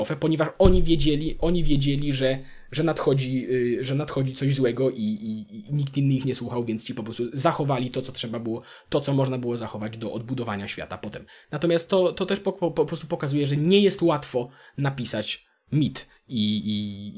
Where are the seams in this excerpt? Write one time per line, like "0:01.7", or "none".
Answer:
0:11.4